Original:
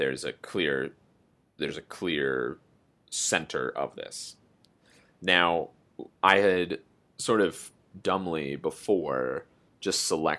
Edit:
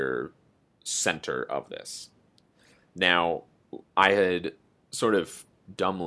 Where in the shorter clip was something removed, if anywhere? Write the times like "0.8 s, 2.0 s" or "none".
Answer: none